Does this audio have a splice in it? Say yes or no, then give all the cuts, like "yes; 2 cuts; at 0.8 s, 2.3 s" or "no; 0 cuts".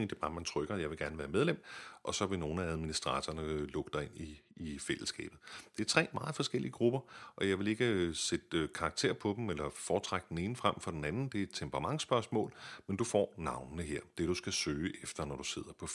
no; 0 cuts